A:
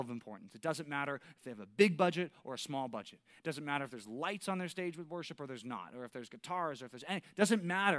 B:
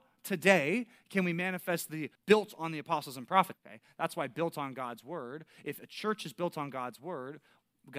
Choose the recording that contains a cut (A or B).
B